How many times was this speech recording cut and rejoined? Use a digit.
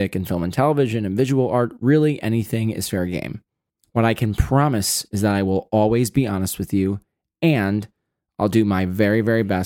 0